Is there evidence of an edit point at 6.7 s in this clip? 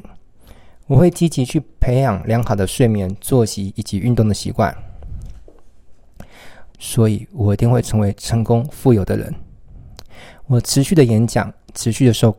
yes; 1 cut; at 6.7 s

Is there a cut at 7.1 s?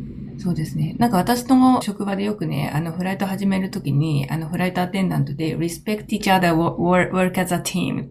no; 1 cut; at 1.8 s

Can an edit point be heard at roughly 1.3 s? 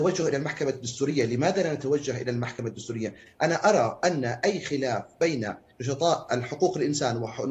no; 1 cut; at 3.3 s

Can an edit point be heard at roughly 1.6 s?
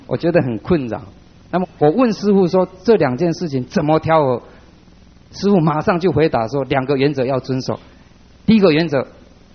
yes; 1 cut; at 1.6 s

